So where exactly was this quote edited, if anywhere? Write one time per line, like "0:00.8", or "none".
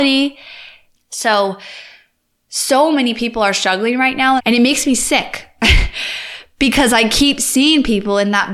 0:00.9
0:04.4